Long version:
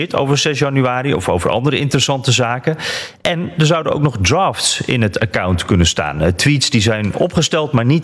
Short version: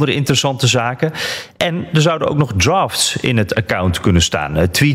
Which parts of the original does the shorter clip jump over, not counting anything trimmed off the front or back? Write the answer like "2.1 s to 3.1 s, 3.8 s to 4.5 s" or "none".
none